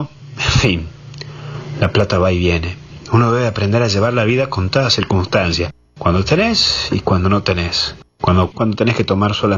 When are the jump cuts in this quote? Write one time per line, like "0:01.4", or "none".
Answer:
0:08.5